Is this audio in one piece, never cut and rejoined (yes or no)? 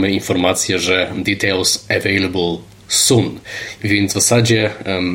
yes